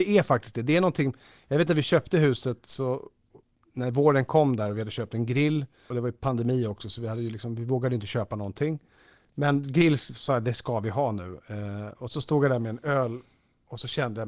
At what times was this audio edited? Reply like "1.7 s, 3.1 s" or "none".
none